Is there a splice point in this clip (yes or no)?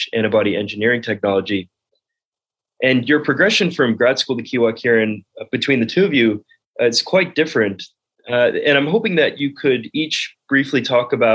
no